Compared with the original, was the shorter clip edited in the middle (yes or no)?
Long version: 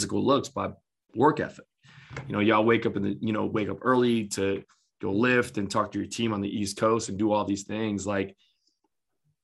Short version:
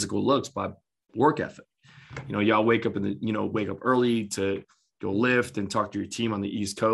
no